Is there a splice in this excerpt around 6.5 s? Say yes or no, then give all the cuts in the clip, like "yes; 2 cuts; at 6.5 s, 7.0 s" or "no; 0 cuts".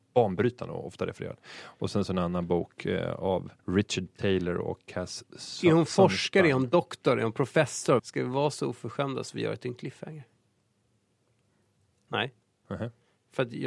no; 3 cuts; at 3.6 s, 8.0 s, 12.1 s